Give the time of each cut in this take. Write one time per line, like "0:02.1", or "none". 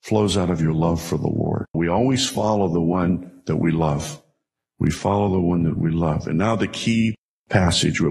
0:01.7